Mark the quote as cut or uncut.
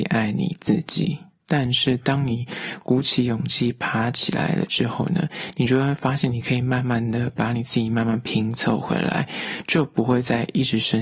cut